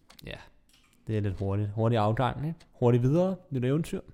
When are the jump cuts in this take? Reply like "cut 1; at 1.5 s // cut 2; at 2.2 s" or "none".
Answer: none